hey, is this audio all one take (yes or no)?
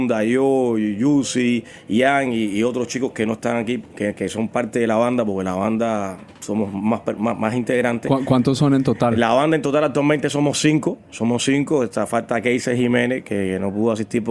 yes